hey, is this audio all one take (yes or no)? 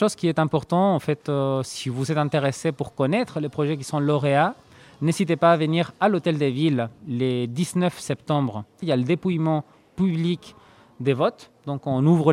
no